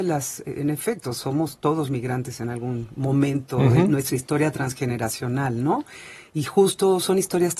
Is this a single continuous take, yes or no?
yes